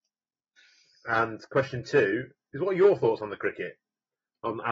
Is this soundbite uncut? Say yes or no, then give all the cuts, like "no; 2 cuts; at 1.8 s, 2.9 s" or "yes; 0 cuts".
yes; 0 cuts